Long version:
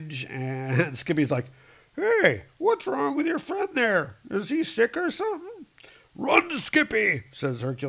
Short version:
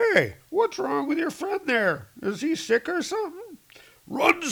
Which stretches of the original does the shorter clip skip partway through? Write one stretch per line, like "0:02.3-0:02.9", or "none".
none